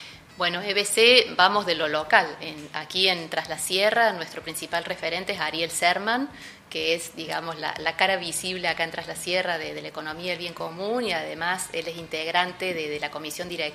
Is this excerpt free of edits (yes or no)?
yes